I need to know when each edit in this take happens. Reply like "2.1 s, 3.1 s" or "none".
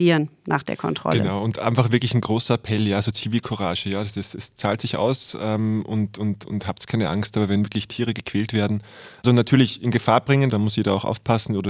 9.2 s, 10.5 s